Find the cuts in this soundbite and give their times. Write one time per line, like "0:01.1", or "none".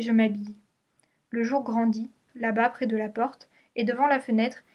0:02.3